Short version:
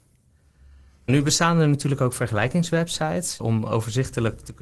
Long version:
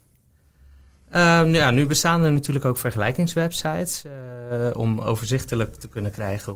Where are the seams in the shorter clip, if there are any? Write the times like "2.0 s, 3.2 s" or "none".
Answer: 1.1 s, 3.4 s